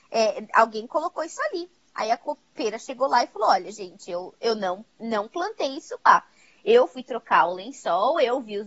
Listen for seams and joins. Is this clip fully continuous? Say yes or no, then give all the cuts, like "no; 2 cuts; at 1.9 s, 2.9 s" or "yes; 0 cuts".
yes; 0 cuts